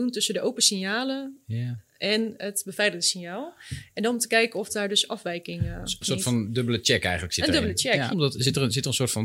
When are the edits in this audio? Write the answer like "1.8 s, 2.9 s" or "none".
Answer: 6.0 s, 8.1 s